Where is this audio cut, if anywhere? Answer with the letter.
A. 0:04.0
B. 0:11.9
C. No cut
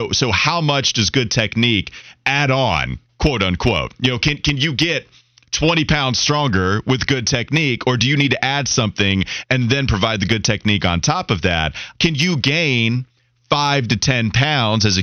B